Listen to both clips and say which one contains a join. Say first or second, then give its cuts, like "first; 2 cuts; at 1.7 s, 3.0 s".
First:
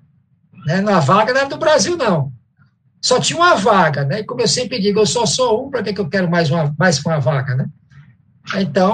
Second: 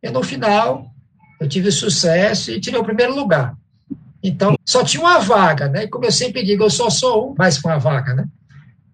second; 2 cuts; at 4.5 s, 7.4 s